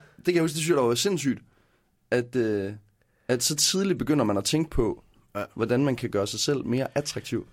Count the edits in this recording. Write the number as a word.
zero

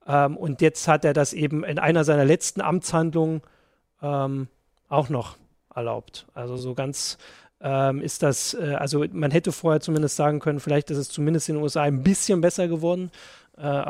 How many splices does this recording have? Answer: zero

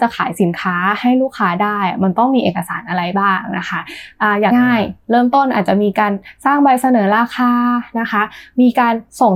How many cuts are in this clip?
one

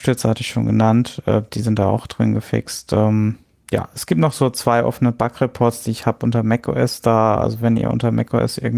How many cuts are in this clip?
zero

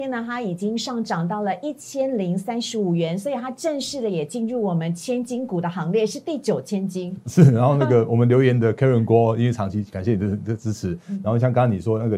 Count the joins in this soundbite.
zero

